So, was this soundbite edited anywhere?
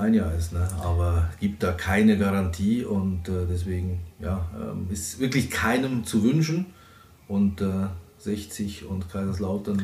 no; 0 cuts

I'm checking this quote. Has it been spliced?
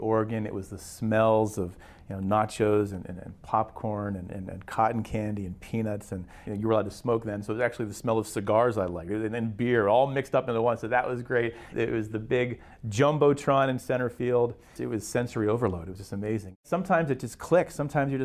yes; 2 cuts; at 4.3 s, 6.5 s

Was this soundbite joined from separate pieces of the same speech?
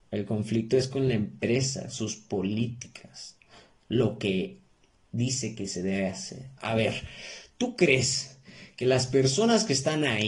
yes; 1 cut; at 6.6 s

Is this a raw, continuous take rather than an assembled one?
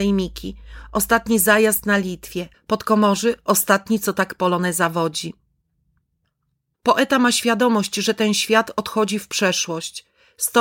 no; 2 cuts; at 2.5 s, 6.7 s

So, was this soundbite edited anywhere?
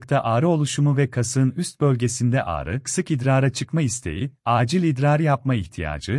yes; 1 cut; at 2.8 s

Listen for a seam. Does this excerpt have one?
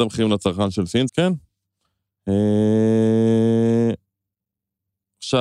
yes; 1 cut; at 1.1 s

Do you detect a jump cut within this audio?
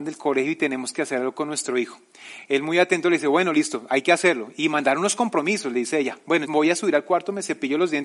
yes; 1 cut; at 6.5 s

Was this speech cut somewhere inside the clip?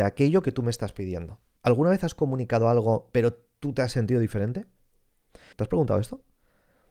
yes; 2 cuts; at 1.6 s, 5.5 s

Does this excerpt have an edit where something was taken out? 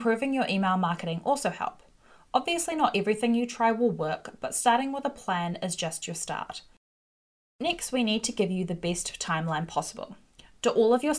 yes; 1 cut; at 7.4 s

